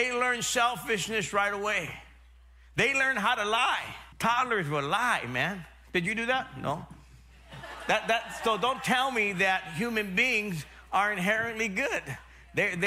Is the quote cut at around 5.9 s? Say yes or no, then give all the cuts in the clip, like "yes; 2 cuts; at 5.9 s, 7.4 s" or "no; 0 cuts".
no; 1 cut; at 4.1 s